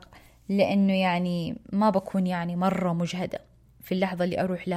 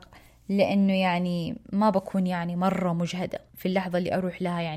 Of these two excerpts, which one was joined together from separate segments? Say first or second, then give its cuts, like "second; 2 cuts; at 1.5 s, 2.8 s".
second; 1 cut; at 3.5 s